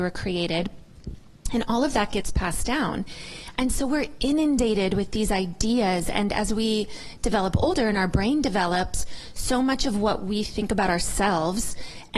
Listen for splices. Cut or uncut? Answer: uncut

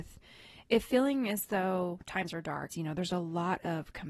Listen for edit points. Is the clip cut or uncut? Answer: cut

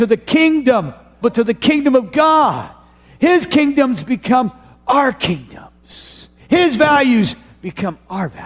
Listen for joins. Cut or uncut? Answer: cut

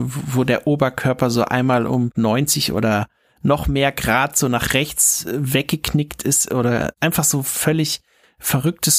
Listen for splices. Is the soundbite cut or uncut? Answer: uncut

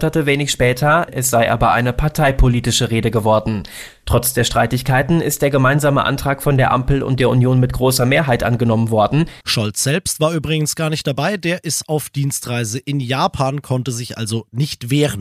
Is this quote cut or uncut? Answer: cut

